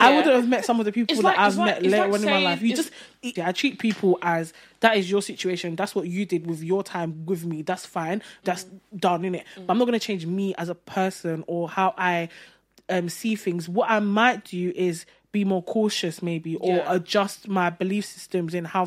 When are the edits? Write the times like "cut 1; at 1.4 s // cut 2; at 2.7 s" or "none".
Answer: cut 1; at 3.4 s // cut 2; at 8.4 s